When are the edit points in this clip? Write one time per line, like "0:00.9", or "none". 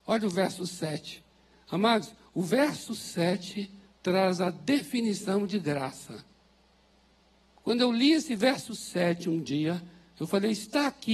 none